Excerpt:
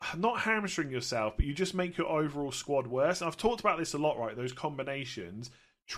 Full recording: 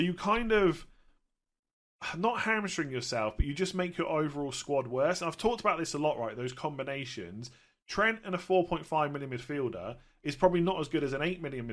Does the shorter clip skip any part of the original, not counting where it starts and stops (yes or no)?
no